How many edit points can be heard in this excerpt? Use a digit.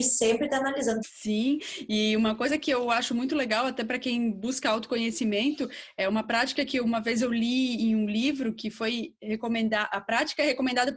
1